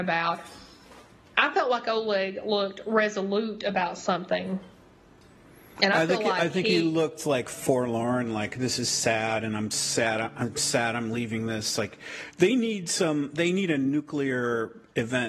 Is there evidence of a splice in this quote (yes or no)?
no